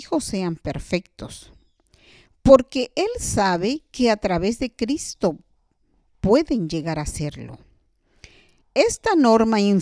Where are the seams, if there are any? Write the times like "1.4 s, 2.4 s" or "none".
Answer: 8.6 s